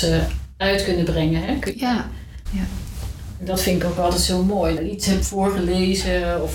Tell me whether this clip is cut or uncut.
cut